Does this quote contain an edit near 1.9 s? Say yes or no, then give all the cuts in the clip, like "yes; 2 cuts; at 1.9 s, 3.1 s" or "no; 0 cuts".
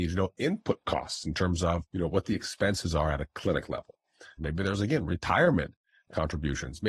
yes; 2 cuts; at 1.9 s, 4.4 s